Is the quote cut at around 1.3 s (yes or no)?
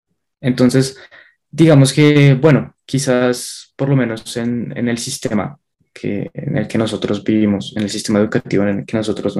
no